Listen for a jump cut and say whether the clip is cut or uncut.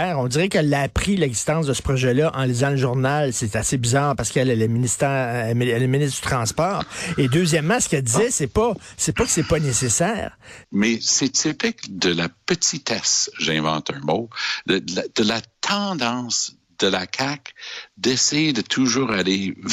cut